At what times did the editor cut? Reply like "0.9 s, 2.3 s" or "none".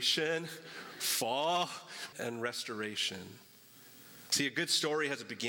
2.1 s